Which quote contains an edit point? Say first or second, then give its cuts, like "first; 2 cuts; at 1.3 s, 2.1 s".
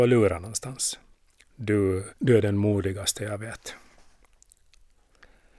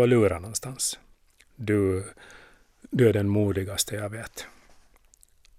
first; 1 cut; at 2.2 s